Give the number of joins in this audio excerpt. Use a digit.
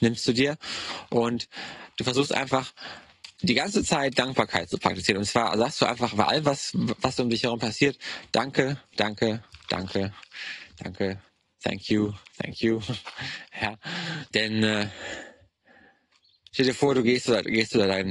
1